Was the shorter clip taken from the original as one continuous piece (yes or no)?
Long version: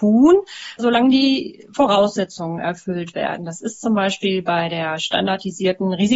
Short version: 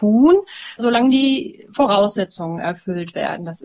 yes